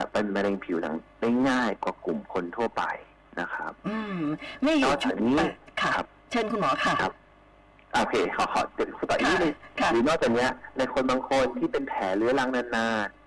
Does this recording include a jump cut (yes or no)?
no